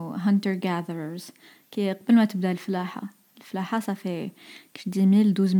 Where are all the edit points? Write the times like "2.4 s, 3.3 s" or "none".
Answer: none